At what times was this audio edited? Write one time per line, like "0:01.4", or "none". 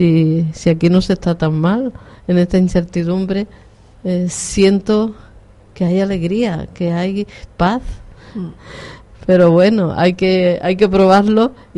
0:08.6